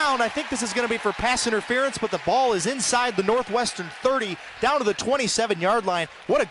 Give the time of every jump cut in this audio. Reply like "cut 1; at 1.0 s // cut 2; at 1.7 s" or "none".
none